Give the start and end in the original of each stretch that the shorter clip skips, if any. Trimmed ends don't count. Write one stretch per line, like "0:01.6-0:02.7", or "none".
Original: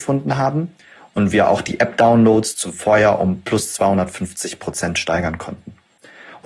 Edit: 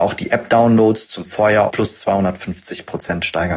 0:03.2-0:03.4